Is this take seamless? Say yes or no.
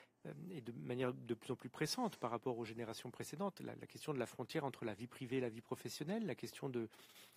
yes